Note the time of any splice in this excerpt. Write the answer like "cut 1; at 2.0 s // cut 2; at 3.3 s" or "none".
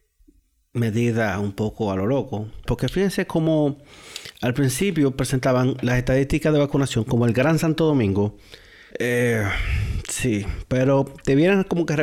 cut 1; at 2.7 s // cut 2; at 8.9 s